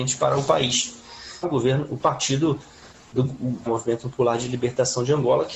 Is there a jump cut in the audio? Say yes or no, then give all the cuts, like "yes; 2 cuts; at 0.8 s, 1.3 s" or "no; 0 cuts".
yes; 2 cuts; at 1.4 s, 3.7 s